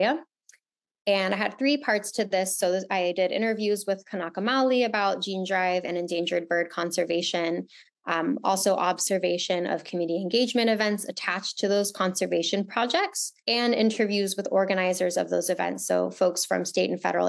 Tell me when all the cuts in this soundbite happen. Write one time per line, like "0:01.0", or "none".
0:13.4